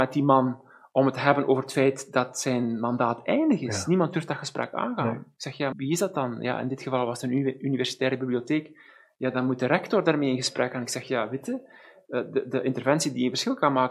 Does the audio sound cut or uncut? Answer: cut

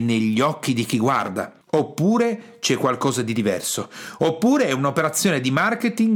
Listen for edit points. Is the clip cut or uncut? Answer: cut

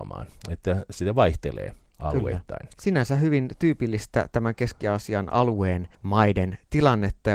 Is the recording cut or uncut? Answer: cut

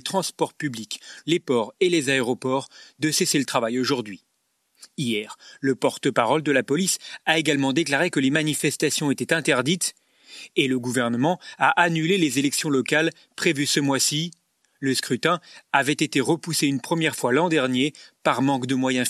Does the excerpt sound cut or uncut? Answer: cut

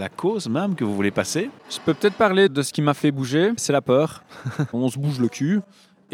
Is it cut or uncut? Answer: cut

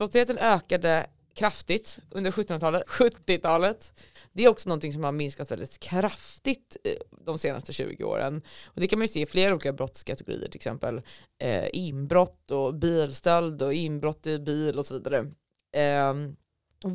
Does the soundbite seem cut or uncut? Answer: cut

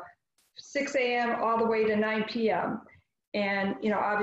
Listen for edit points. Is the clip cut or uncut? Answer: uncut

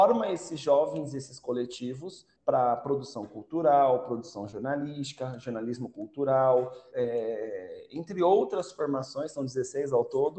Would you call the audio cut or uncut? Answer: cut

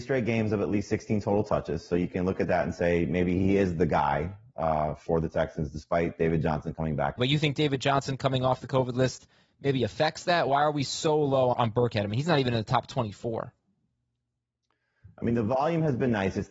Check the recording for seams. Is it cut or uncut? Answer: cut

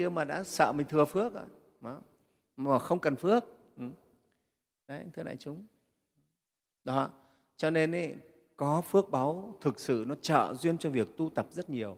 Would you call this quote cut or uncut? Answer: uncut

